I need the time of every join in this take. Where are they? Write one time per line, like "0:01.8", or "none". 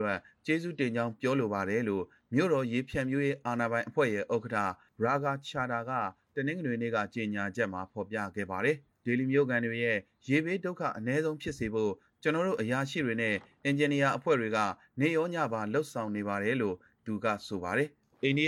none